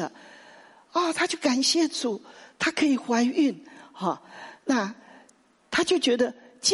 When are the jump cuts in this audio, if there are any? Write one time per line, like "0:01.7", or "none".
none